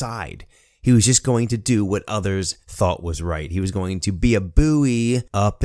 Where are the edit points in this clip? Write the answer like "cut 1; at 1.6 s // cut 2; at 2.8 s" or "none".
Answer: none